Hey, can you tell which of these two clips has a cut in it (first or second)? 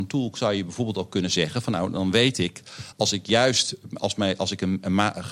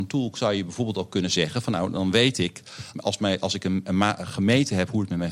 second